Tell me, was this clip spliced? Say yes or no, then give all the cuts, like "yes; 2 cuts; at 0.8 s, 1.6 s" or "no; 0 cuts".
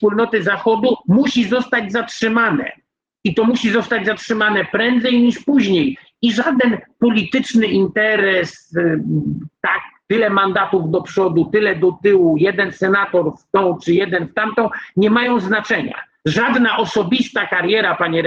no; 0 cuts